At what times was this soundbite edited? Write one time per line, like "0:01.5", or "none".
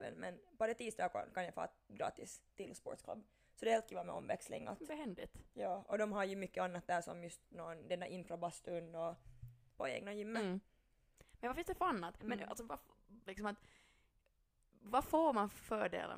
0:09.7
0:12.2
0:13.3